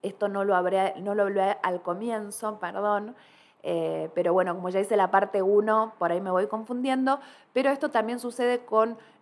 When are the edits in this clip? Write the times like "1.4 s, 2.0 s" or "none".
none